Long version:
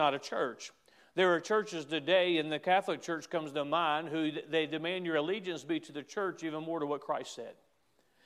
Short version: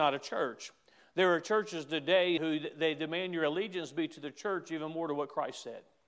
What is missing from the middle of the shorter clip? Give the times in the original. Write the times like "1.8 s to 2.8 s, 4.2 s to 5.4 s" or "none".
2.4 s to 4.1 s